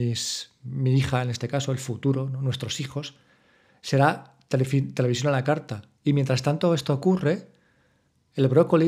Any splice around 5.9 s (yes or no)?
yes